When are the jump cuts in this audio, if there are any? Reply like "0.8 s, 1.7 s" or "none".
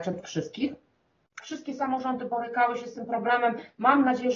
1.4 s